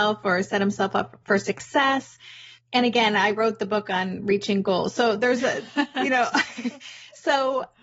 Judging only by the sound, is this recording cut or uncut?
uncut